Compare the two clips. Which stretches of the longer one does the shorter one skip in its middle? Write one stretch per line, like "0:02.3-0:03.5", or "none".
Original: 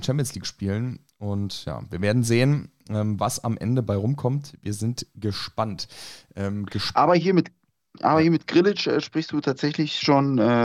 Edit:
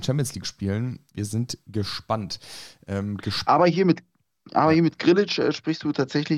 0:01.1-0:04.6